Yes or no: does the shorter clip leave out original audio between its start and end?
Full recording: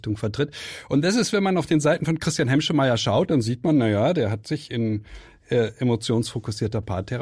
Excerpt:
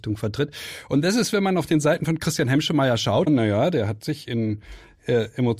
yes